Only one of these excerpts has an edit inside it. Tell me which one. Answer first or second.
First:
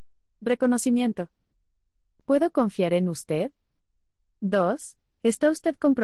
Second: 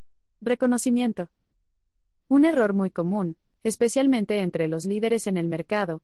first